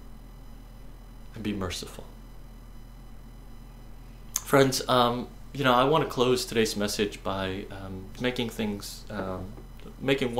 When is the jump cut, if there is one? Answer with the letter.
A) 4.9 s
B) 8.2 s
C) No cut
B